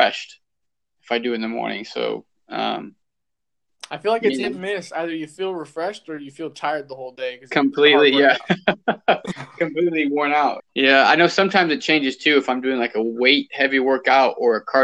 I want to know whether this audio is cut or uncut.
cut